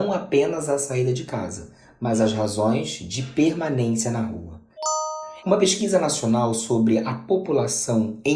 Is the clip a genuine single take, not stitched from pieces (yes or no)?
no